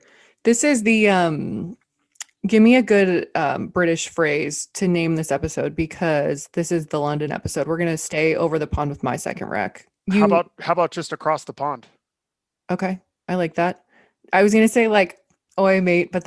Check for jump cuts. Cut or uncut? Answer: uncut